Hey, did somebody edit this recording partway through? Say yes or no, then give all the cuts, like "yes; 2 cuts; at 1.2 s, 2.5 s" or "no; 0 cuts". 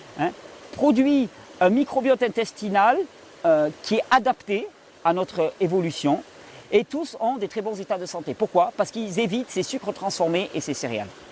yes; 1 cut; at 6.6 s